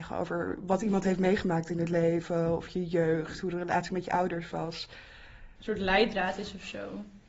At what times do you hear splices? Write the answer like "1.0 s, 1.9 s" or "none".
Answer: 5.6 s